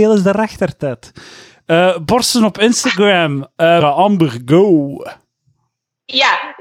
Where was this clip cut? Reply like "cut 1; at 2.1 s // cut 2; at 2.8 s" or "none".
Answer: cut 1; at 3.8 s